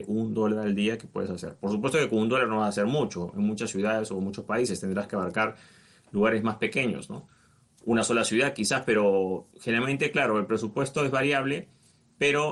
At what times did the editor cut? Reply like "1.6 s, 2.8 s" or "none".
none